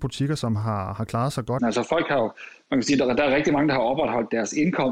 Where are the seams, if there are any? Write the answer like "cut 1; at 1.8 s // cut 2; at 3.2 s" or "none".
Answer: cut 1; at 1.6 s